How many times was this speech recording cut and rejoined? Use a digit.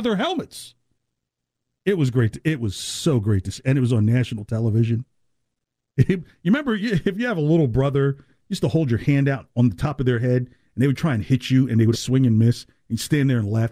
2